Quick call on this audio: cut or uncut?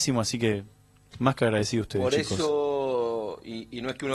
uncut